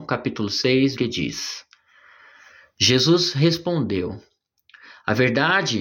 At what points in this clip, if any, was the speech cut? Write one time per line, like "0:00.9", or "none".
0:01.0